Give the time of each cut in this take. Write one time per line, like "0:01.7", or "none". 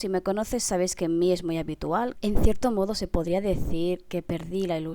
0:02.1